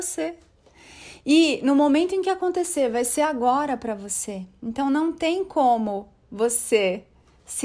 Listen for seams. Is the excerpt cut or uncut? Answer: uncut